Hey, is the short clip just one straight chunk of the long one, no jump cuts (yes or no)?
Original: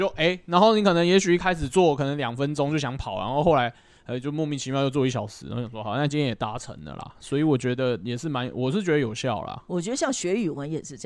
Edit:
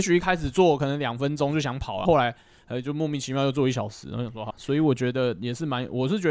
no